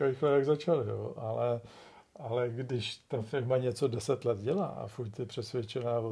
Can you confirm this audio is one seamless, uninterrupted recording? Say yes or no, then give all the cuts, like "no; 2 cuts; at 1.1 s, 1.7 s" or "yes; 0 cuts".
yes; 0 cuts